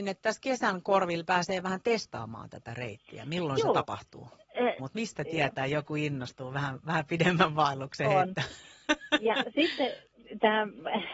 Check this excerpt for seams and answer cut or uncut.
cut